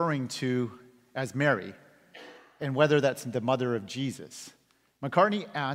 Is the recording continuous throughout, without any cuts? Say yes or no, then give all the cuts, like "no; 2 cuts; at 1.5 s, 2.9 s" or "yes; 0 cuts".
yes; 0 cuts